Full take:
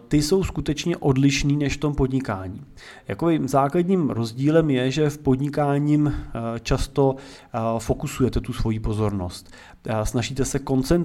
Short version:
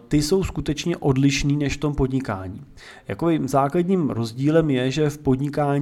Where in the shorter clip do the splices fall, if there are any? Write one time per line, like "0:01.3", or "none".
none